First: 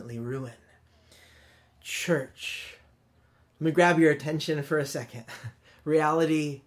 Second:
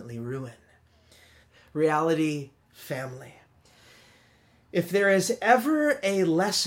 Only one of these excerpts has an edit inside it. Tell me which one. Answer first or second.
second